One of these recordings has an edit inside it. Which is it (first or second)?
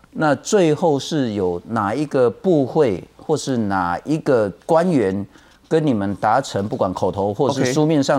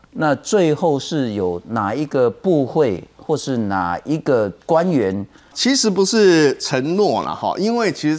second